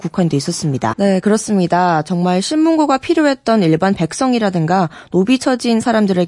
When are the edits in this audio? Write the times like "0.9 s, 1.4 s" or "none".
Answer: 0.9 s